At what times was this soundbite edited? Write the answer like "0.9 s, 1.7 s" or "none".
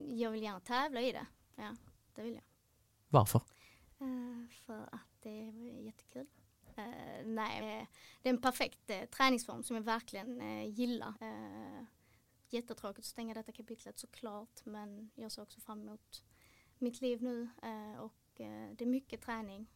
7.6 s, 11.2 s